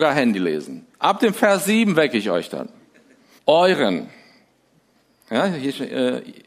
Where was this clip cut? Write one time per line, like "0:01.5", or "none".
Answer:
0:00.9
0:03.4